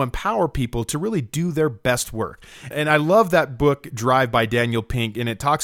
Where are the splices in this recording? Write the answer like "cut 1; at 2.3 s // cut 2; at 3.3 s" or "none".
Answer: cut 1; at 2.7 s